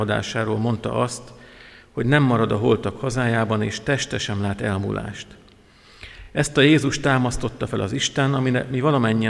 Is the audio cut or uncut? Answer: uncut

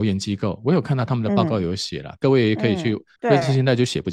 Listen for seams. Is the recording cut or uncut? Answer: cut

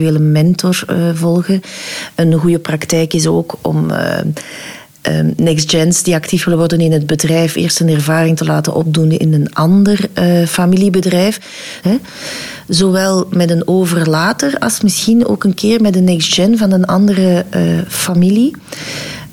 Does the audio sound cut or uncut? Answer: cut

